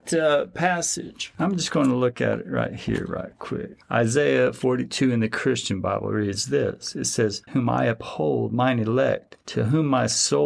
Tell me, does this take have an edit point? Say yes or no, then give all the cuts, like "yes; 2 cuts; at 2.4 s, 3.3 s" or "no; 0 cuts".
yes; 1 cut; at 7.5 s